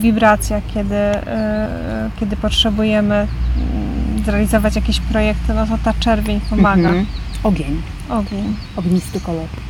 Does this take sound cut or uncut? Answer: uncut